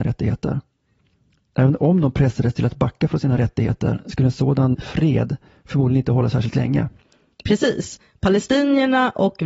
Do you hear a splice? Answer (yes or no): yes